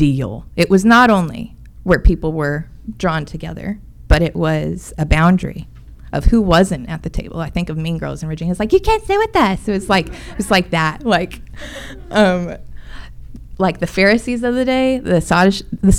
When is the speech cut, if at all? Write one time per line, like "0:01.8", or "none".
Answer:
none